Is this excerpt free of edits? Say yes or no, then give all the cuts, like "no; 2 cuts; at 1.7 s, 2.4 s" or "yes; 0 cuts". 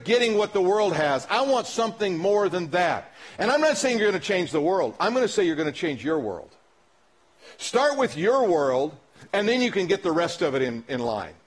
yes; 0 cuts